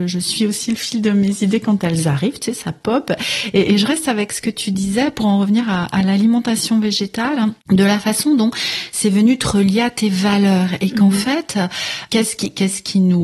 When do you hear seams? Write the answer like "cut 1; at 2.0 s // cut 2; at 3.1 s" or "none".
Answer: cut 1; at 7.6 s // cut 2; at 12.1 s